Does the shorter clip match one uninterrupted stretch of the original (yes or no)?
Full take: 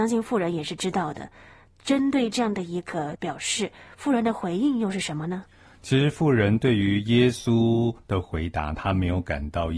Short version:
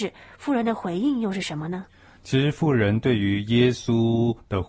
yes